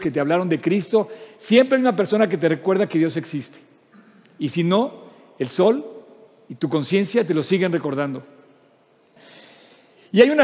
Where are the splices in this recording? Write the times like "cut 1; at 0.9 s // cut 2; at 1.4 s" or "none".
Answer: cut 1; at 9.2 s